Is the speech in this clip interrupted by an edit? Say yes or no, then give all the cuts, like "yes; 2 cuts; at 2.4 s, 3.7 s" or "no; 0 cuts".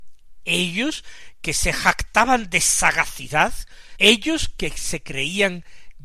yes; 1 cut; at 4.0 s